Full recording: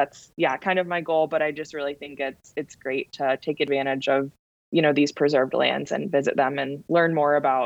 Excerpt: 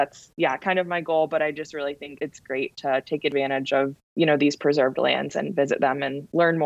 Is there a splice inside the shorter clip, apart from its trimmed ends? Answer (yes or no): yes